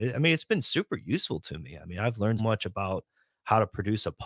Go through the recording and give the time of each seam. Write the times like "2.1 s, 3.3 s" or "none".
2.4 s